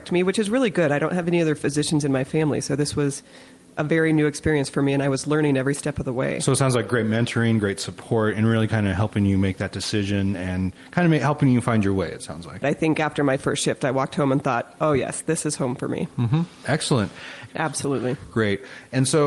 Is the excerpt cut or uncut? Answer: cut